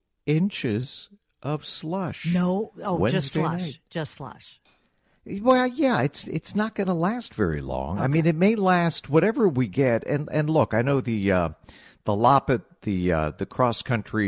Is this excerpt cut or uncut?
uncut